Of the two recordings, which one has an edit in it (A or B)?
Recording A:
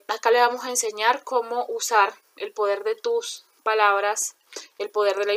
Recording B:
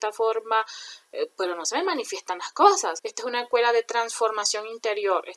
B